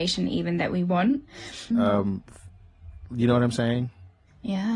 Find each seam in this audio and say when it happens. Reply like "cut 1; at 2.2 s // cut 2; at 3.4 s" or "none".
cut 1; at 1.7 s